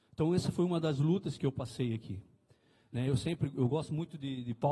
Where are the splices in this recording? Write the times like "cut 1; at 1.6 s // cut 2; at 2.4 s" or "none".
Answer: none